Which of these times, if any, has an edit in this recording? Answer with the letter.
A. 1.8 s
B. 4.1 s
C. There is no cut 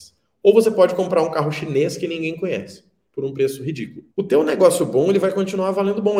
B